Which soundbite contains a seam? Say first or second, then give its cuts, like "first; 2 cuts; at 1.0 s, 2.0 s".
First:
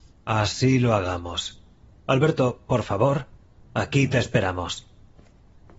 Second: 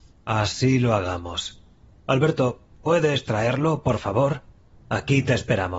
first; 1 cut; at 2.7 s